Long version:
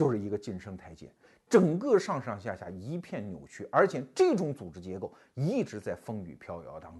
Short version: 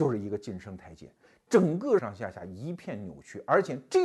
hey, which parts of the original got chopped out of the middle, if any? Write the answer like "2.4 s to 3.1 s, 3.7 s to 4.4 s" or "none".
2.0 s to 2.2 s